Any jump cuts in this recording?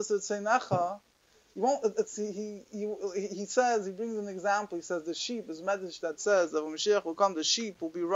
yes; 1 cut; at 1.5 s

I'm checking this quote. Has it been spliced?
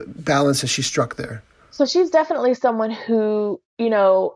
no; 0 cuts

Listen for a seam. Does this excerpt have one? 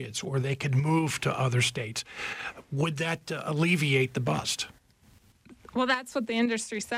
no; 0 cuts

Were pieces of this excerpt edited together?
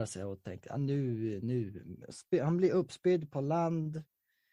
no; 0 cuts

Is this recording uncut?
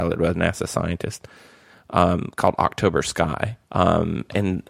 no; 1 cut; at 3.6 s

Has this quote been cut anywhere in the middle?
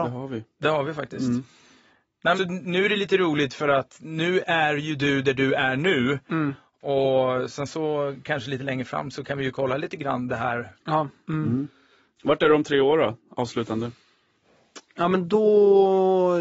yes; 2 cuts; at 2.4 s, 11.2 s

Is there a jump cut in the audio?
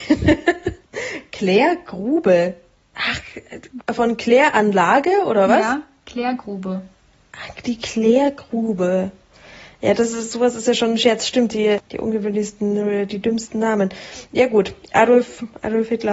no; 0 cuts

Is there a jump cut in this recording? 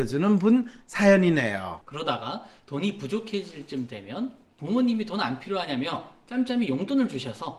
yes; 1 cut; at 1.8 s

